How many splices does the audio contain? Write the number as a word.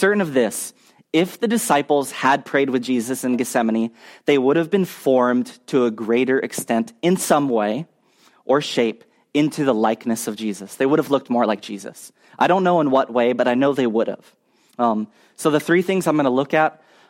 one